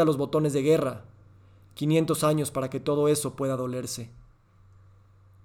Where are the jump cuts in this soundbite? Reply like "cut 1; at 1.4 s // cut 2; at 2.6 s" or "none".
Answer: none